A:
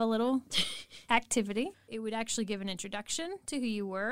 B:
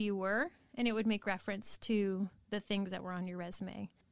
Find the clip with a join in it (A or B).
A